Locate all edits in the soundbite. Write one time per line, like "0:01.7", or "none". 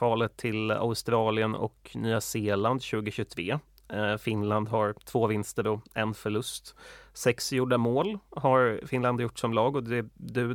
none